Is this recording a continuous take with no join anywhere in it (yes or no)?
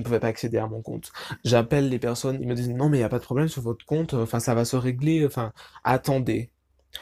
yes